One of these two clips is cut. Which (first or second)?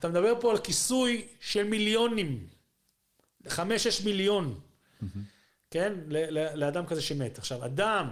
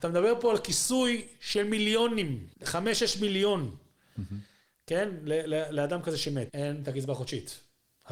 second